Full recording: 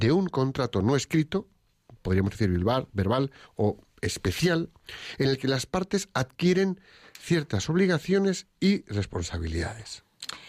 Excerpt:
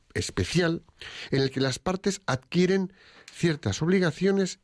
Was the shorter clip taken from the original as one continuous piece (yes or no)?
yes